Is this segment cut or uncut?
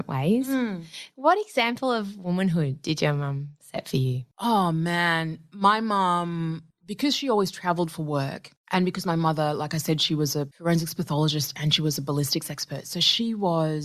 uncut